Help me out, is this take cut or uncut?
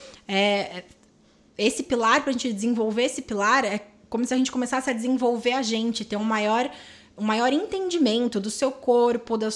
uncut